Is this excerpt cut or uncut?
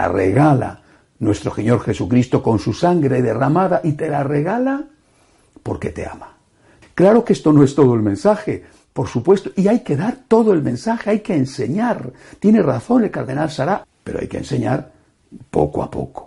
cut